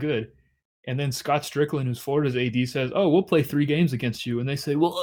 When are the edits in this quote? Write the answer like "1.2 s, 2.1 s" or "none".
none